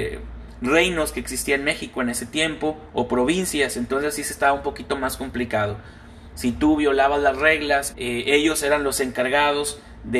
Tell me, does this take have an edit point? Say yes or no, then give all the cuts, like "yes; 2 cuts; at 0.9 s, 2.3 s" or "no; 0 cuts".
yes; 2 cuts; at 6.3 s, 7.9 s